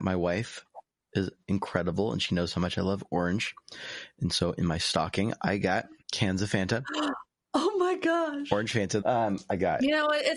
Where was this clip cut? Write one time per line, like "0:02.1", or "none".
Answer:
0:06.0
0:09.0